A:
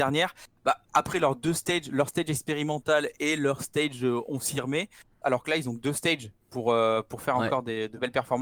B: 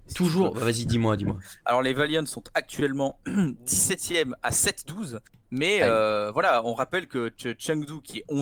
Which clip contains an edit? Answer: A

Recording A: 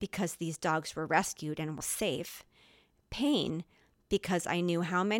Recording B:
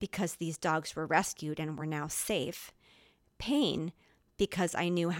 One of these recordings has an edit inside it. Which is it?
A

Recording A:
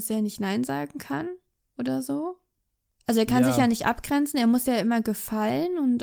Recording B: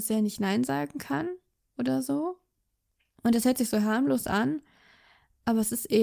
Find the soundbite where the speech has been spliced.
A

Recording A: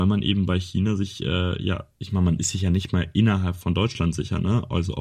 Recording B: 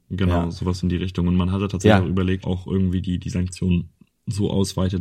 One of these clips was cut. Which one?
B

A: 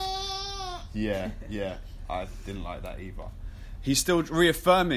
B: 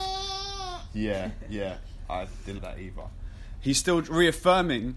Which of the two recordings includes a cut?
B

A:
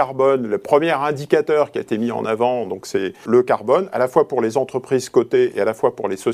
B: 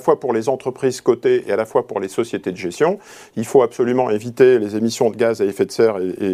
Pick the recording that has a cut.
A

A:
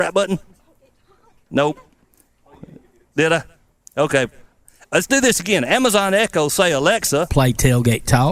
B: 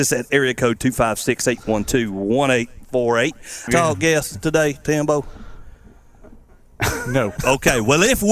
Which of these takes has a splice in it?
B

